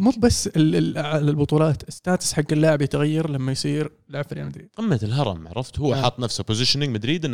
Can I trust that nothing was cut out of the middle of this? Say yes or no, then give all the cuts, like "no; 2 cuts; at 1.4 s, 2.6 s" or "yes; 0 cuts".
yes; 0 cuts